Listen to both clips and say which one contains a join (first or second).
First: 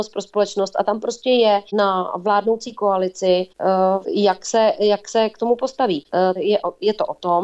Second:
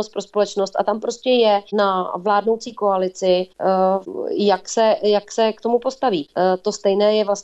first